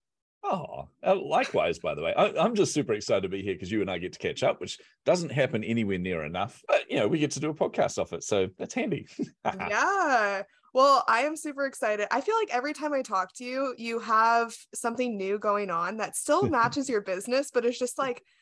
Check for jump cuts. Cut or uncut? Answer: uncut